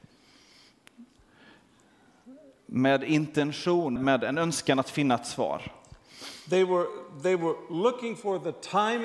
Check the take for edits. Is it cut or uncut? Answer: cut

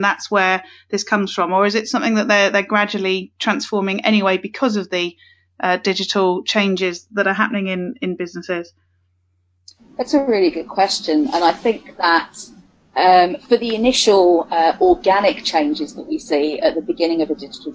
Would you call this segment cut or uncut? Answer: uncut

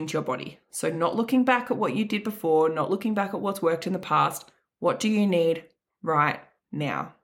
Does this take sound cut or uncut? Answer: uncut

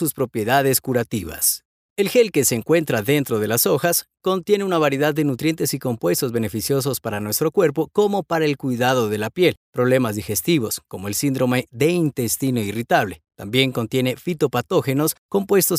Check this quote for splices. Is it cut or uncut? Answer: uncut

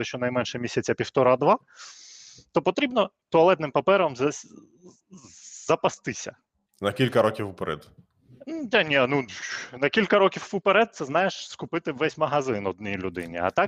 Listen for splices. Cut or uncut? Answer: uncut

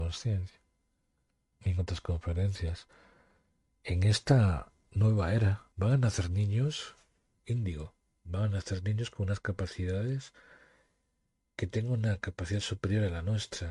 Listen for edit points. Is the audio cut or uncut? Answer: cut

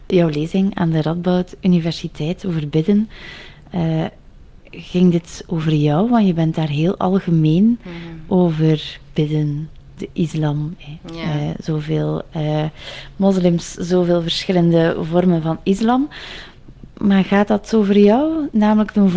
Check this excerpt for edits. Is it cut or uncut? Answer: uncut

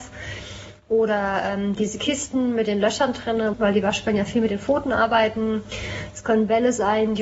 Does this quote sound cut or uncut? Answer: cut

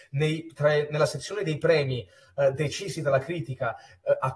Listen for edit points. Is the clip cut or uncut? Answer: uncut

